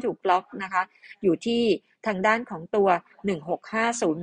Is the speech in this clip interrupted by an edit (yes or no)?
no